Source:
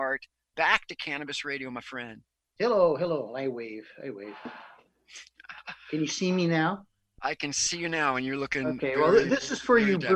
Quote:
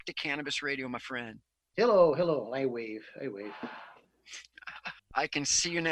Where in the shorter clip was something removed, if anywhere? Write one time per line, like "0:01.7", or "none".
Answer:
0:05.0

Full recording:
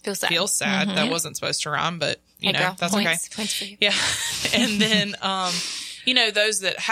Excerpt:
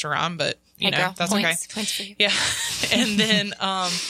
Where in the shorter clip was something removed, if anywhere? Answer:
none

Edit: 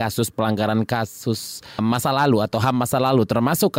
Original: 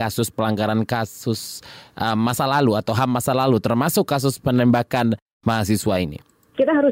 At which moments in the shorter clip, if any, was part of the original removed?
0:01.8

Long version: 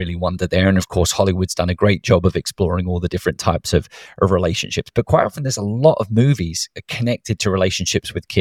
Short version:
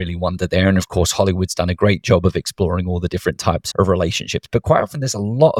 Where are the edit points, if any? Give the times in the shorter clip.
0:03.7

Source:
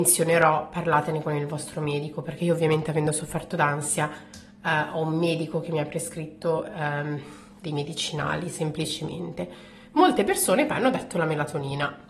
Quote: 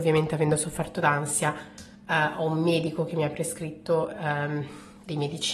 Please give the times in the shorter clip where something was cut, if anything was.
none

